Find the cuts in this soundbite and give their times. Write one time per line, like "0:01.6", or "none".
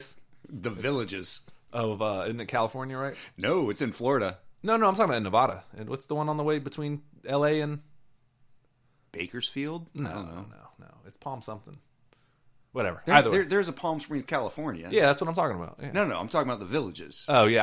none